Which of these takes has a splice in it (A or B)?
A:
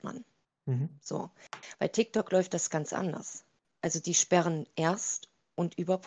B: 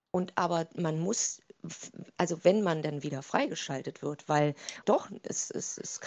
B